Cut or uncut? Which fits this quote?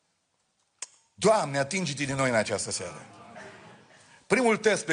uncut